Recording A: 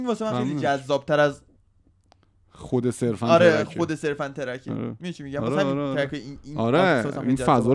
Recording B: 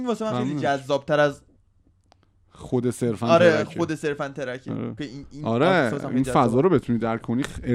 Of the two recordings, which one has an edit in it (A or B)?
B